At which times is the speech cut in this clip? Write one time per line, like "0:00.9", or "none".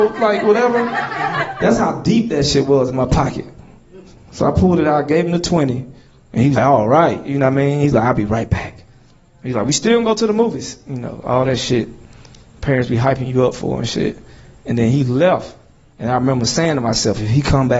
0:06.6